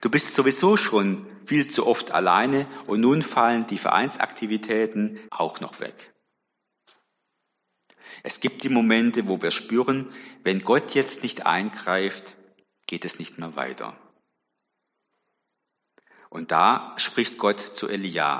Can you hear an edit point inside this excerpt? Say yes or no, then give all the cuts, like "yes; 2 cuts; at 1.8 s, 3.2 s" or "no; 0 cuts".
yes; 1 cut; at 5.3 s